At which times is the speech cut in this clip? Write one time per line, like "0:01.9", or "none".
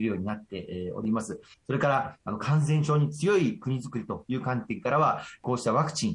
0:01.5